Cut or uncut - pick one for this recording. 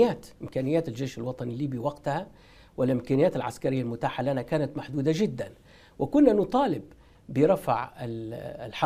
uncut